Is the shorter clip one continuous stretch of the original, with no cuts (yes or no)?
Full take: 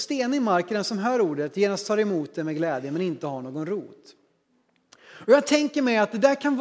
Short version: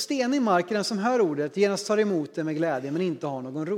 yes